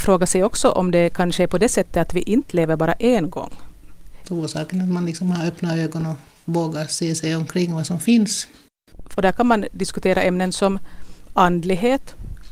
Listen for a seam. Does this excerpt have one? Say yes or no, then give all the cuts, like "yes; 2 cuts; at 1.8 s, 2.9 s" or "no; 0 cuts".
yes; 2 cuts; at 4.2 s, 9.1 s